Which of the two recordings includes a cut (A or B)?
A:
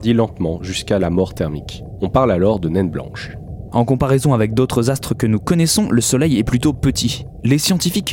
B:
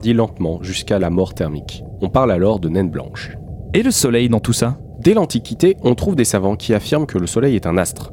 A